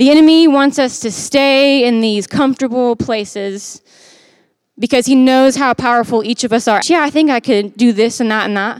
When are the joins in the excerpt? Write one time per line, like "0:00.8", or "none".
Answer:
0:06.8